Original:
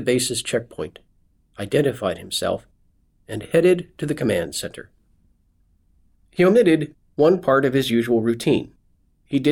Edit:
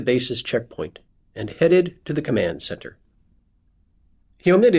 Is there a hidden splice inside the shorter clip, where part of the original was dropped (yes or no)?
yes